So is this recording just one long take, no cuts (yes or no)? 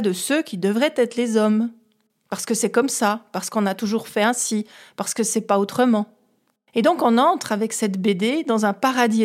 yes